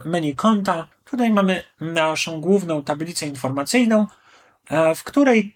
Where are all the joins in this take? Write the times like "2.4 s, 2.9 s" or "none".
0.9 s